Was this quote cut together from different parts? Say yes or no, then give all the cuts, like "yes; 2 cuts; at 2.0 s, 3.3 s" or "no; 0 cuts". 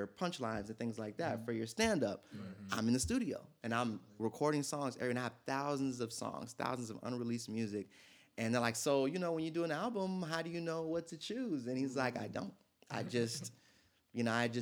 no; 0 cuts